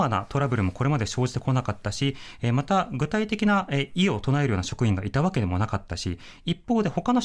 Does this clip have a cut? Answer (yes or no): no